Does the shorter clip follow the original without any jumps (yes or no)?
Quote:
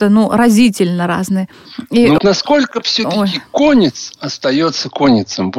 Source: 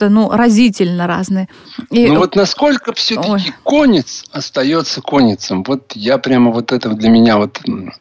no